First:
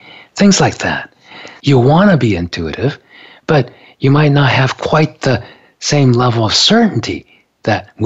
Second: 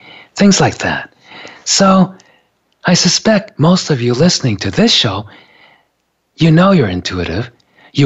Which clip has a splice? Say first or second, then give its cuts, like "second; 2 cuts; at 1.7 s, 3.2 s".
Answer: first; 1 cut; at 1.6 s